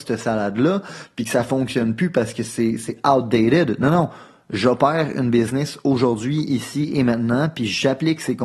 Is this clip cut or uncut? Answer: uncut